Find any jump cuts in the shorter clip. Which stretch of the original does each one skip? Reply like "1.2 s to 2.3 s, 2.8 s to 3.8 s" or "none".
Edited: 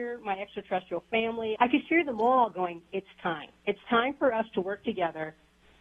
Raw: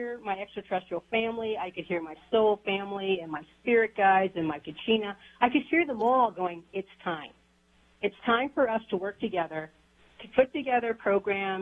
1.6 s to 5.4 s, 7.4 s to 8.0 s